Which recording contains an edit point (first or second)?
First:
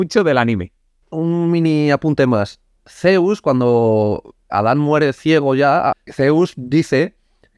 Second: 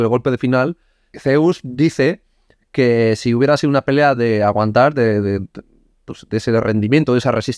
first